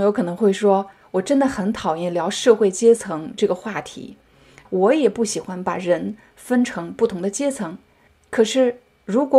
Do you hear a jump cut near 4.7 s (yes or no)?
yes